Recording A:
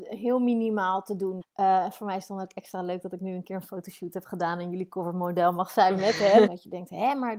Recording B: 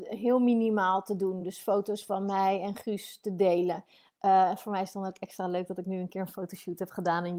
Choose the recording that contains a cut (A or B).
A